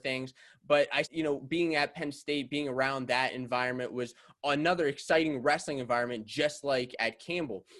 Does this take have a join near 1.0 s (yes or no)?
yes